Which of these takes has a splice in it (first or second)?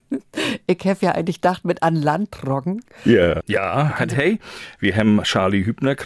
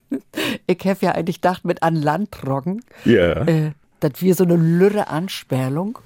first